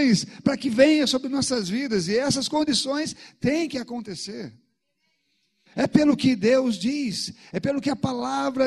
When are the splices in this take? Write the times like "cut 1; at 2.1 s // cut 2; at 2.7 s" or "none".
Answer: cut 1; at 5.7 s